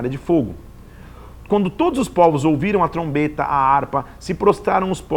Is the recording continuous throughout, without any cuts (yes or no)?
yes